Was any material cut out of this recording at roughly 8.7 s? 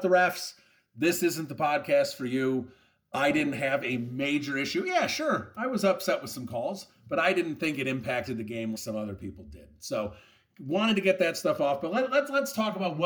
yes; 1 cut; at 8.7 s

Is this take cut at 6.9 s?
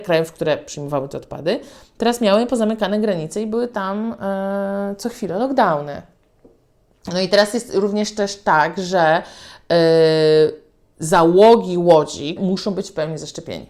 yes; 2 cuts; at 6.9 s, 12.4 s

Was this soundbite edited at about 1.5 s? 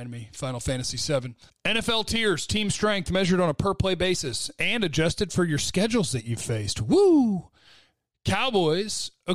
yes; 1 cut; at 1.5 s

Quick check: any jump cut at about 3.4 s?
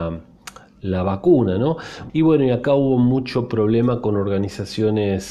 no; 1 cut; at 2.1 s

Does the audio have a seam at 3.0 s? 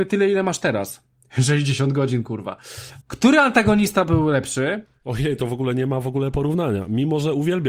yes; 1 cut; at 3.0 s

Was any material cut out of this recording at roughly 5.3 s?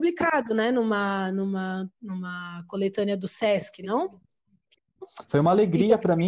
yes; 1 cut; at 5.3 s

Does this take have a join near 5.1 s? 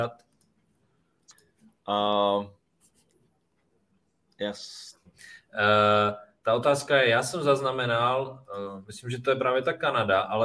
yes; 1 cut; at 5.1 s

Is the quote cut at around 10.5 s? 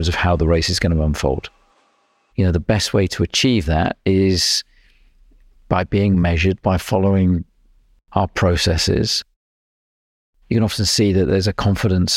no; 2 cuts; at 2.3 s, 6.6 s

